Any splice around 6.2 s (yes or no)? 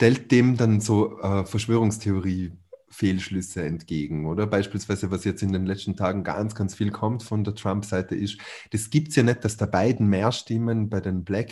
no